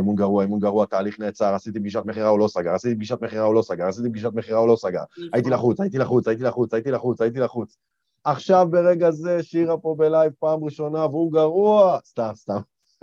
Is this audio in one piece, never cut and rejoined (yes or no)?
yes